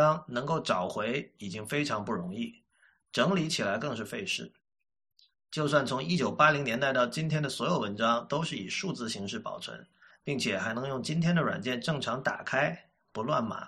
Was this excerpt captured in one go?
no; 2 cuts; at 5.3 s, 10.1 s

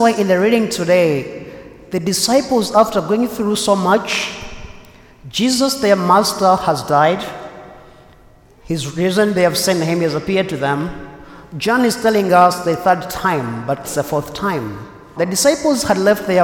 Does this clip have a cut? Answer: yes; 2 cuts; at 13.8 s, 15.2 s

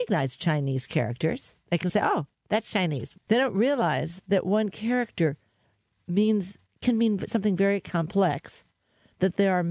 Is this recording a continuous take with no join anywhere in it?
no; 1 cut; at 3.1 s

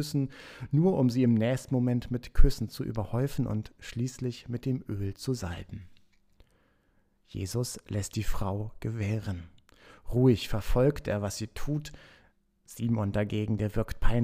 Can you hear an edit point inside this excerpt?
no; 0 cuts

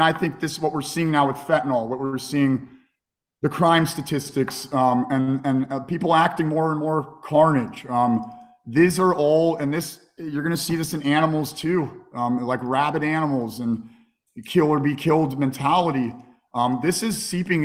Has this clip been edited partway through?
no; 0 cuts

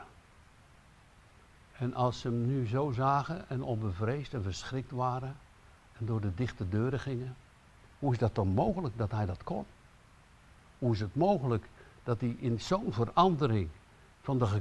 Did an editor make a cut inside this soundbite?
no; 0 cuts

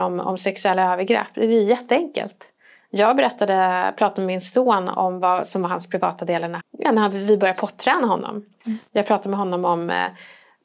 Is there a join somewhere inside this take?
yes; 1 cut; at 6.6 s

